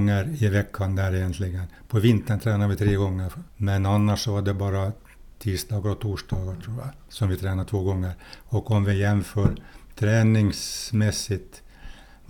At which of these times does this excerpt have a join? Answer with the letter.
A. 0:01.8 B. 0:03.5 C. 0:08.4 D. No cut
B